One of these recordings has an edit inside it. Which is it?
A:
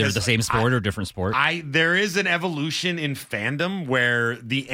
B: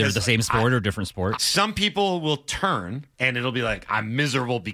B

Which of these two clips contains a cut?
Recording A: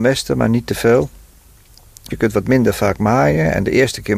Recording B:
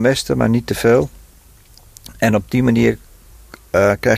A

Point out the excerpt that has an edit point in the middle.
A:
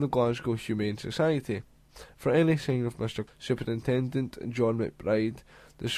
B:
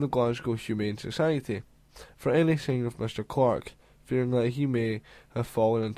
A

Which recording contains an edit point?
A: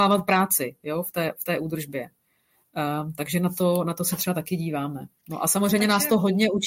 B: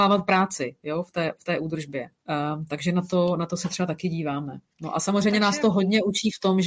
B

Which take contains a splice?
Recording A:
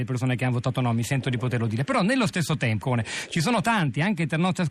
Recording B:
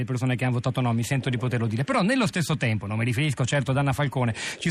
A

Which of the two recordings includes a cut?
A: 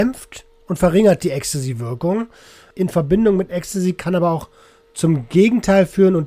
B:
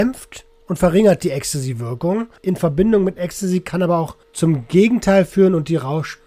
B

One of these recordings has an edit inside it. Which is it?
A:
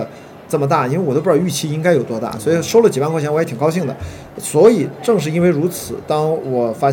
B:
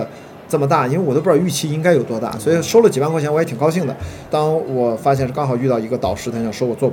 B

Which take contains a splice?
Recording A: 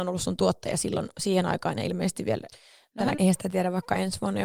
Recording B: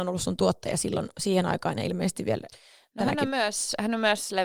A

